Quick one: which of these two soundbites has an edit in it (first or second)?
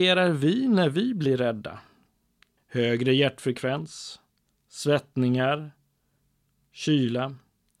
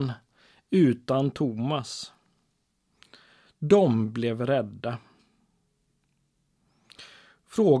first